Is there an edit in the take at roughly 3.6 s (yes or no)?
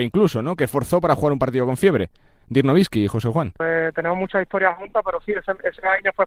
yes